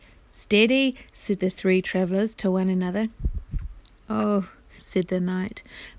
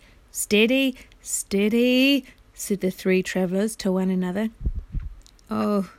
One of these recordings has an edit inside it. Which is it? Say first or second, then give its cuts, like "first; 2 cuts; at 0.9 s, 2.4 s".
first; 2 cuts; at 1.1 s, 4.8 s